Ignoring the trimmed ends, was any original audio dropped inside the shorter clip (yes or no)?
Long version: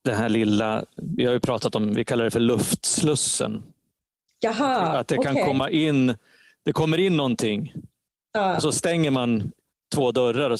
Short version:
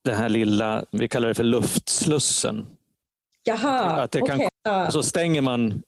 yes